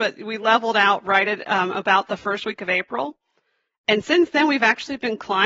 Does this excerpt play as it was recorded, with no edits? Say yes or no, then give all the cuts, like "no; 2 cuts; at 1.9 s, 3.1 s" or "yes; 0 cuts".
yes; 0 cuts